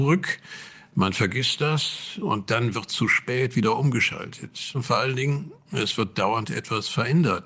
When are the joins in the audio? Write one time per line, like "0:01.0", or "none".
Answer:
0:04.7